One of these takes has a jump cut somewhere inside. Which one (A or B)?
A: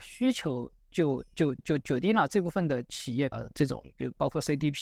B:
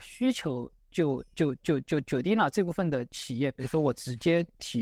A